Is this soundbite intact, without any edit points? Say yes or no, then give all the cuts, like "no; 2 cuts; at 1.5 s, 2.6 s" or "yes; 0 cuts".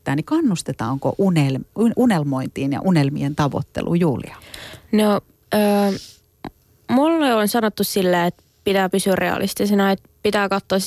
yes; 0 cuts